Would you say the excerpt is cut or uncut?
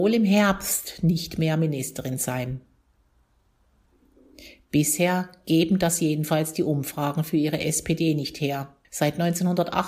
cut